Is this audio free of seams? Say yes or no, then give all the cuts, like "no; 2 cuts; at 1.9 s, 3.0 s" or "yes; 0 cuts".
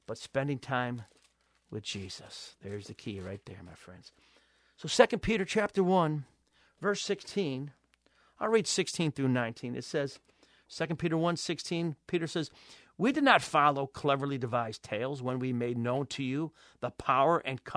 yes; 0 cuts